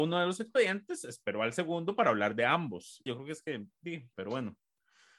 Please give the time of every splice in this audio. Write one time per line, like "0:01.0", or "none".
0:03.1
0:04.1